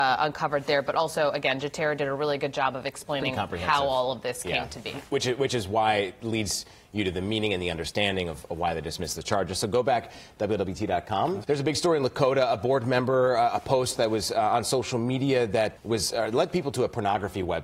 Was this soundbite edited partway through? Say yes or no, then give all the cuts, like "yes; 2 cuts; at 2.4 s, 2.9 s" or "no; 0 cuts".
yes; 2 cuts; at 11.4 s, 15.8 s